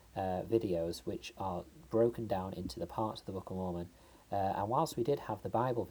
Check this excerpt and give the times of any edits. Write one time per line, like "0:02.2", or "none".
none